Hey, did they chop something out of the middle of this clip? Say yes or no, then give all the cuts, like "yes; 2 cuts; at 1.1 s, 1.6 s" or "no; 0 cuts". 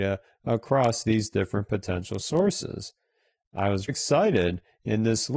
yes; 1 cut; at 3.9 s